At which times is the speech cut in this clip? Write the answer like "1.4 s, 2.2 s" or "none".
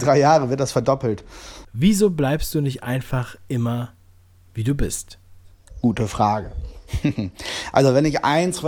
1.6 s